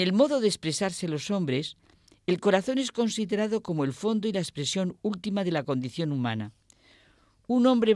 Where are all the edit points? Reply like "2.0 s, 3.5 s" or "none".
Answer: none